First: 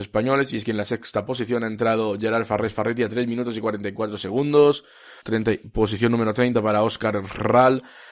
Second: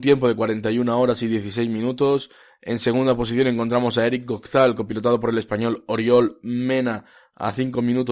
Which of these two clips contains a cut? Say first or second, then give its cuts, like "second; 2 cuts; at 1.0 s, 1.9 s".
first; 1 cut; at 5.2 s